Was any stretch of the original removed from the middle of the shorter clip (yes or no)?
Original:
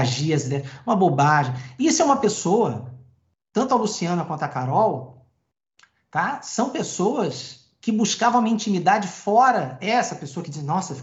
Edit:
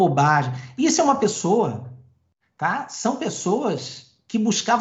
yes